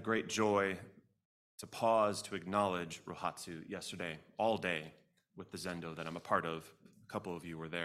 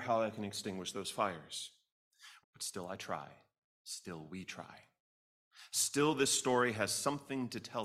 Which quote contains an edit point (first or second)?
second